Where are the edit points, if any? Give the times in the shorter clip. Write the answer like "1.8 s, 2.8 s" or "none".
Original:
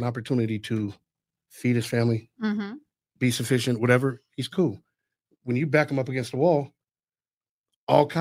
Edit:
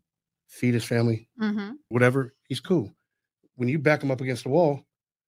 1.9 s